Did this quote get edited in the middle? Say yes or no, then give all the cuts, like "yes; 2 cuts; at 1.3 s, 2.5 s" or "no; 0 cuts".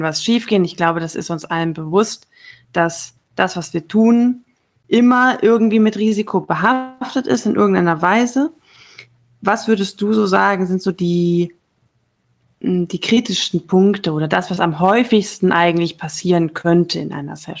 no; 0 cuts